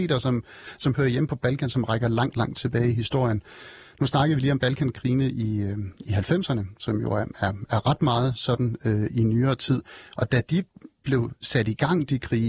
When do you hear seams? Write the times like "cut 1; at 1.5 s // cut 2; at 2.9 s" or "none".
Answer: none